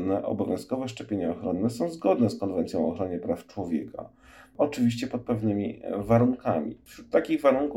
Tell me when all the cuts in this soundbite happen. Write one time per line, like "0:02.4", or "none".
none